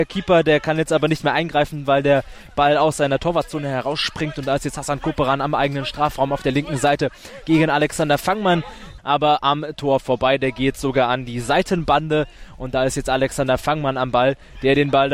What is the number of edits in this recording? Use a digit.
1